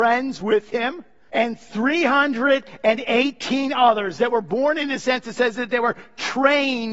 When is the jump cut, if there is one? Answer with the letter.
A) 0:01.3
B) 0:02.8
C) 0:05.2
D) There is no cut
A